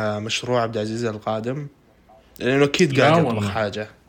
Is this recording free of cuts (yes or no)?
yes